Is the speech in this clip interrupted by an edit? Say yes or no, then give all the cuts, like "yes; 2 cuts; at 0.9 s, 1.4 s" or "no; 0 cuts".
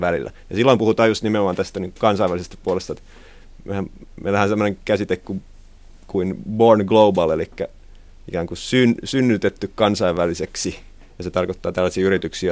no; 0 cuts